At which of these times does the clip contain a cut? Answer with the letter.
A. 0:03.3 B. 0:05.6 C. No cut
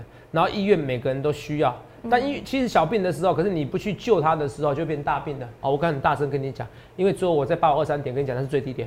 B